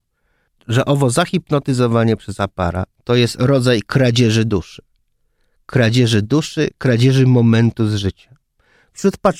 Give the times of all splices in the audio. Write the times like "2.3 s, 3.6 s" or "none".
2.9 s